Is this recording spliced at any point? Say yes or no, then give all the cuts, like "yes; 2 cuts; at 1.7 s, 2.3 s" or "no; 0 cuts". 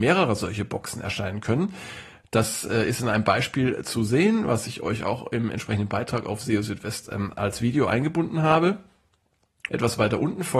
yes; 1 cut; at 9.7 s